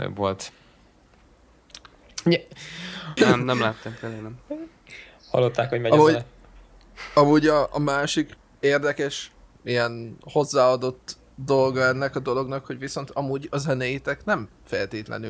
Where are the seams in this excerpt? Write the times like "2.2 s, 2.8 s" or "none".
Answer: 3.2 s, 9.6 s